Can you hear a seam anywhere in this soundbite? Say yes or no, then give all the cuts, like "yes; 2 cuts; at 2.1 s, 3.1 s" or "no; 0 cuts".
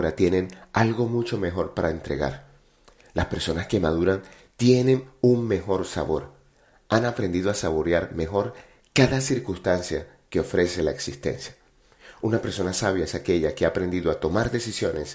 no; 0 cuts